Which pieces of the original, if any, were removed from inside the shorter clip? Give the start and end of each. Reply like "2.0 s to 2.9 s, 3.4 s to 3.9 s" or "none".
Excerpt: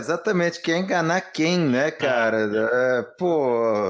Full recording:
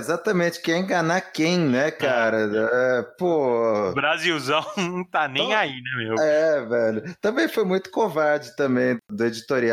none